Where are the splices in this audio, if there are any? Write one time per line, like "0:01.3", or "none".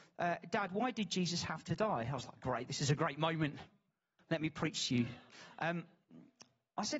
none